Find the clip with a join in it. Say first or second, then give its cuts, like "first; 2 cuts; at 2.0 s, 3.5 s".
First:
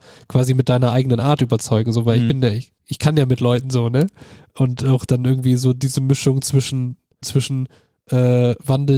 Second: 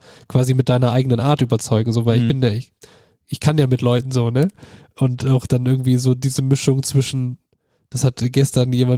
first; 2 cuts; at 2.8 s, 7.2 s